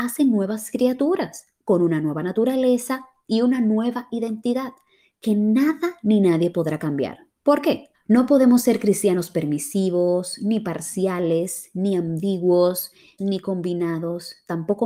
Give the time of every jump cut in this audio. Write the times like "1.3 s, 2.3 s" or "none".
7.9 s, 13.2 s